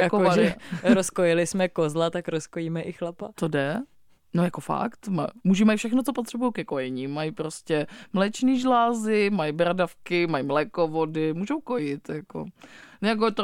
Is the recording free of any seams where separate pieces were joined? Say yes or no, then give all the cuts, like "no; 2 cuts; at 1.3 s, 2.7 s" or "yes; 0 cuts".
yes; 0 cuts